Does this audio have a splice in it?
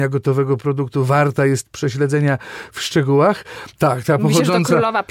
yes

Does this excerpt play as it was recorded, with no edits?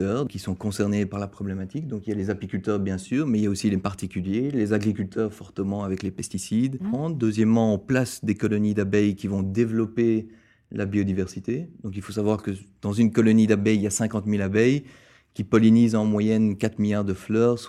no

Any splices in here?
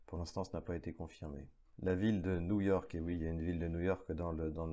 no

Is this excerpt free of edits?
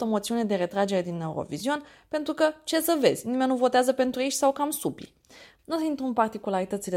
no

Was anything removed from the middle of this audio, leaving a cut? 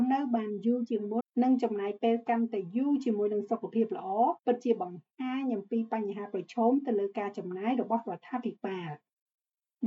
yes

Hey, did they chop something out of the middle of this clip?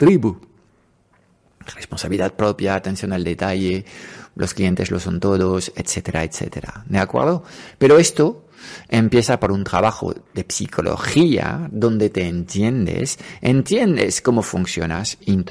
no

